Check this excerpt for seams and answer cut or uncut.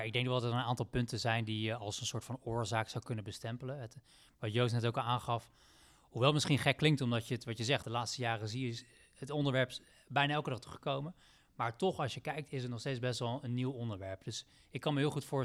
cut